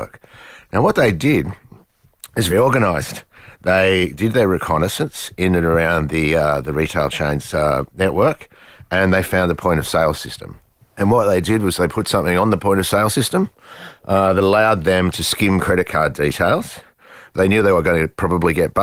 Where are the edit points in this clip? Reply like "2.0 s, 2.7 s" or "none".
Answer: 2.5 s